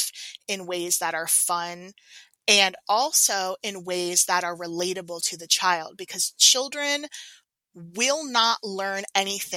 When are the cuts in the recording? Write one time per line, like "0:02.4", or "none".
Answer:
none